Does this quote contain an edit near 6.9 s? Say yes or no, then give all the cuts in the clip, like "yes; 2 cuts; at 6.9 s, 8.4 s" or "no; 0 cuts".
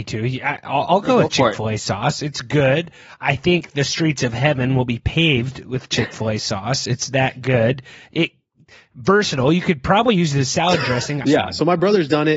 no; 1 cut; at 11.2 s